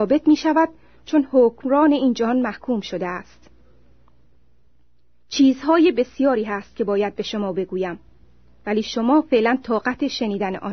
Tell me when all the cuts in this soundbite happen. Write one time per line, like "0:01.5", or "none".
none